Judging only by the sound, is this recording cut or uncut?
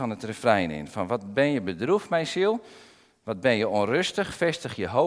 uncut